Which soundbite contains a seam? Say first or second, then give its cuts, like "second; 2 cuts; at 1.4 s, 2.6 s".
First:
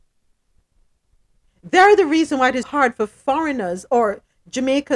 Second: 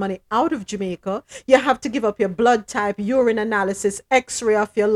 first; 1 cut; at 2.6 s